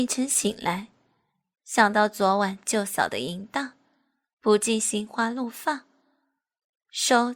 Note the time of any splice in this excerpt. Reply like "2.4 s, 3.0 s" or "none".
none